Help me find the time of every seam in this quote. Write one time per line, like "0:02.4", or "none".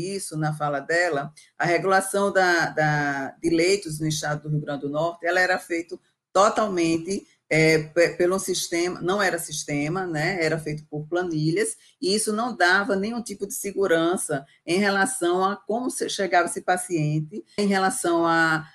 0:17.6